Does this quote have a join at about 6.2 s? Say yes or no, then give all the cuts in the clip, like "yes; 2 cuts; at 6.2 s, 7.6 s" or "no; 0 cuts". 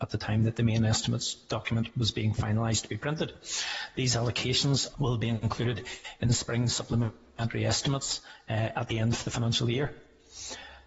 no; 1 cut; at 4.9 s